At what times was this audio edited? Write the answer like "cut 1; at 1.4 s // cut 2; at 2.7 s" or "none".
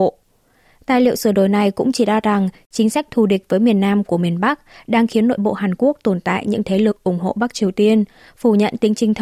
none